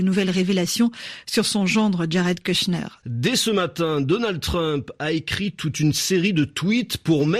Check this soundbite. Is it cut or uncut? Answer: cut